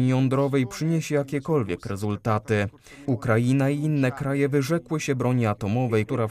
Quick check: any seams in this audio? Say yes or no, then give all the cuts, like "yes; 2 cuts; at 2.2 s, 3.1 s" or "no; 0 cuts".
yes; 1 cut; at 3.1 s